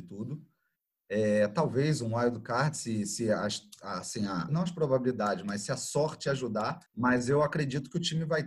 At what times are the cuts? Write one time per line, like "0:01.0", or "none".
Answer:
0:04.5
0:06.9

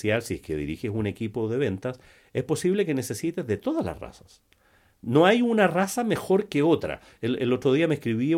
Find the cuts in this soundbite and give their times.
none

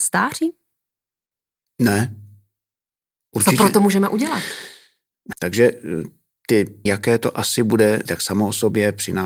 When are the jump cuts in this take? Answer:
0:05.3
0:06.9
0:08.1

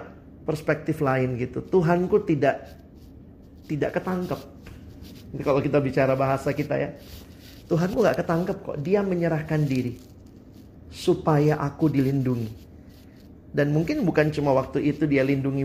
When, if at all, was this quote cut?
none

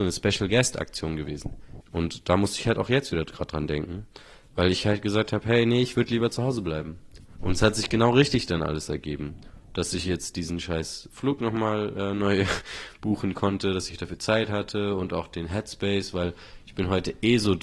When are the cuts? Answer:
0:01.8

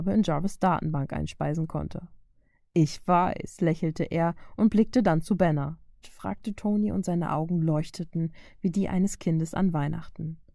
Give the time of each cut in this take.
0:06.0

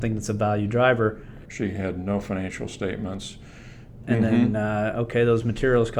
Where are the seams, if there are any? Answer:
0:01.5
0:04.0

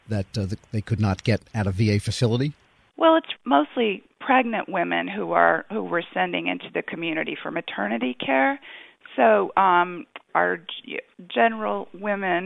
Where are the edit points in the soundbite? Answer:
0:03.3
0:10.3

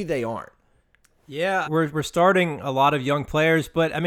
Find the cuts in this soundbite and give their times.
0:01.6

